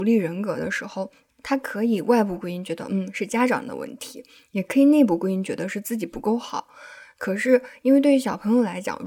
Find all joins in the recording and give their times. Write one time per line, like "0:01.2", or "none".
0:01.3

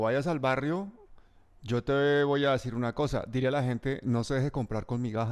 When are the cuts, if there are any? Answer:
none

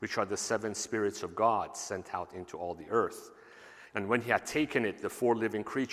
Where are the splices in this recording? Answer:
0:03.9

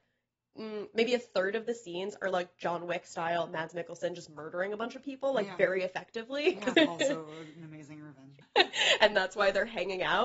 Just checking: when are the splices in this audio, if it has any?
0:06.7
0:08.4

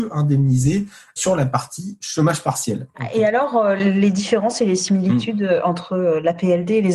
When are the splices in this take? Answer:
none

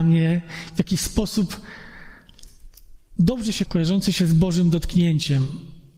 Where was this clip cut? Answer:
0:03.7

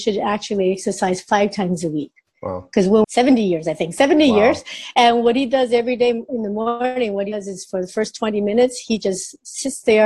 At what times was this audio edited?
0:03.0

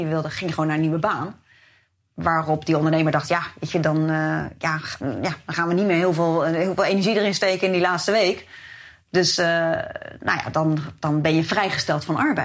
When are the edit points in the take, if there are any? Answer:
0:05.0

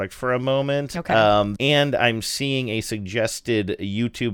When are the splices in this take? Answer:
0:01.6

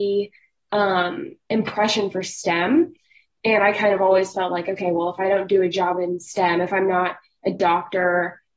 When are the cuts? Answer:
none

